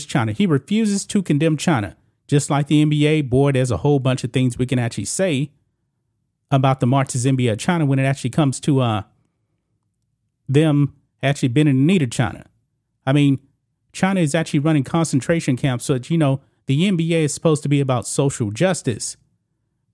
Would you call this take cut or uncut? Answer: uncut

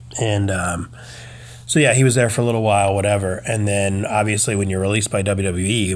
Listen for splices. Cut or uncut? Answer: uncut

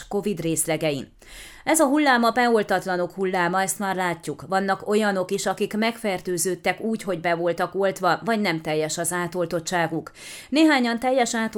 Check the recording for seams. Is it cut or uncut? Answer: uncut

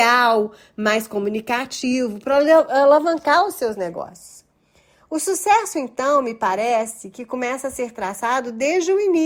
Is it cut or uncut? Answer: uncut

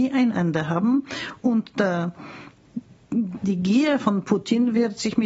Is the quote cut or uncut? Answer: uncut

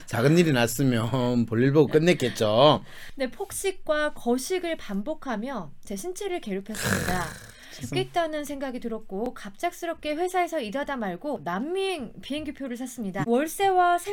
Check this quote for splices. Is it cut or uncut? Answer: cut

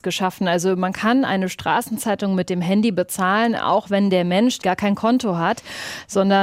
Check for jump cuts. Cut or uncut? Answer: cut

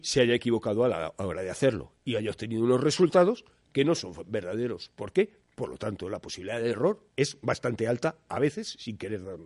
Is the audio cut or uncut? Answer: cut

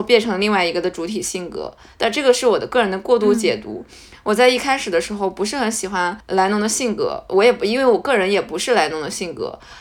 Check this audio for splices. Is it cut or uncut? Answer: uncut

